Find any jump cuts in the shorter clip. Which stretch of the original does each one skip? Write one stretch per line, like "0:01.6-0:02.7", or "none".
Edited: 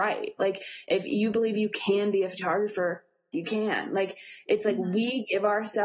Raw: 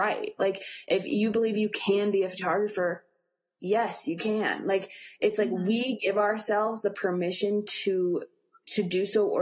0:03.3-0:04.1